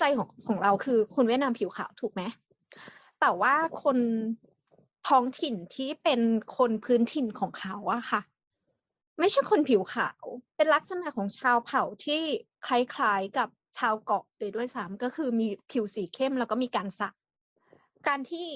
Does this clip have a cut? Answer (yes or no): yes